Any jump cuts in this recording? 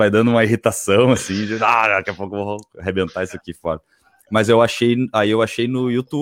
no; 0 cuts

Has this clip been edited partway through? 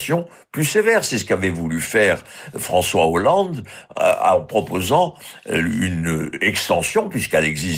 no; 0 cuts

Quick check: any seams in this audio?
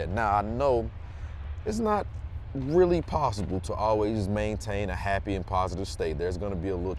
no; 0 cuts

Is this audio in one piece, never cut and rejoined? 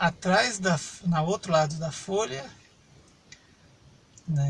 yes; 0 cuts

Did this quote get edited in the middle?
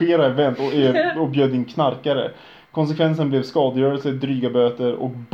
no; 0 cuts

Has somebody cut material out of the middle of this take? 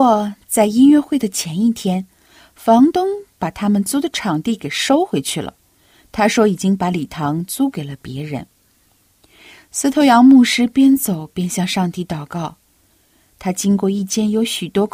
no; 0 cuts

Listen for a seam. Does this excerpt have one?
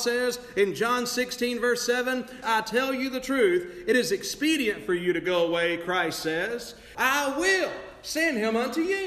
yes; 2 cuts; at 2.4 s, 6.9 s

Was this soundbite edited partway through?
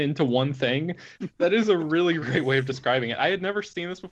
yes; 2 cuts; at 1.1 s, 2.2 s

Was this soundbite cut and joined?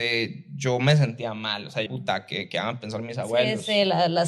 yes; 1 cut; at 1.9 s

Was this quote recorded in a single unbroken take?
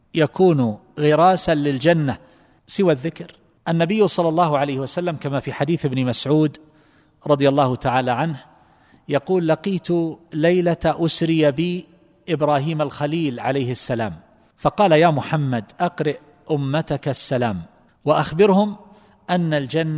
yes; 0 cuts

